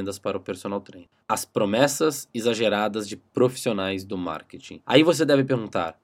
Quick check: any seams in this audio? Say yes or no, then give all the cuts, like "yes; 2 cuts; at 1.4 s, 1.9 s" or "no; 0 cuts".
no; 0 cuts